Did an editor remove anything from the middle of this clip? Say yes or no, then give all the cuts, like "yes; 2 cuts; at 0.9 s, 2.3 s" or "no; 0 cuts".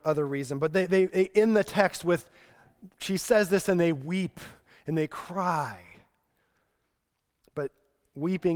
no; 0 cuts